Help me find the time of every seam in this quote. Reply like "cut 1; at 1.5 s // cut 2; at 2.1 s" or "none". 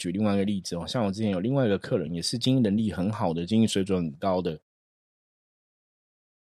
none